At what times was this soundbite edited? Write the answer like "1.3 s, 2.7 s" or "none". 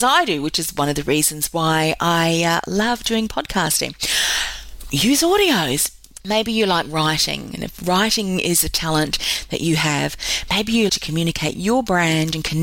6.2 s, 10.9 s

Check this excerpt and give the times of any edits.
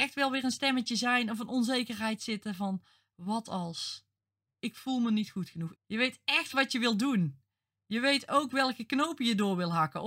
4.6 s, 5.8 s

